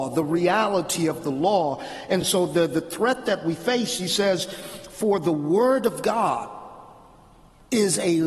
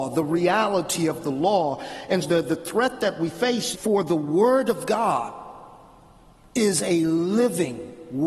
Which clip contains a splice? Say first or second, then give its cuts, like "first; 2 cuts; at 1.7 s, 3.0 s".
second; 2 cuts; at 2.2 s, 3.7 s